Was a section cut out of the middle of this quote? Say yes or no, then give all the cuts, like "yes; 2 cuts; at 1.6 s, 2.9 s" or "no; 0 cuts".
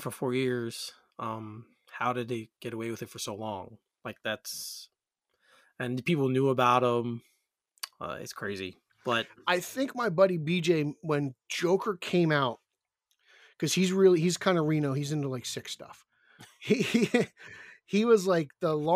no; 0 cuts